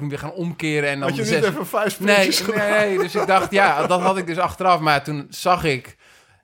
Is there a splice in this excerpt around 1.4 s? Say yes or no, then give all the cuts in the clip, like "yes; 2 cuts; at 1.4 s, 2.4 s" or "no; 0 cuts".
no; 0 cuts